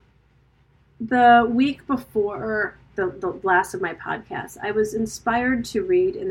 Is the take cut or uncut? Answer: cut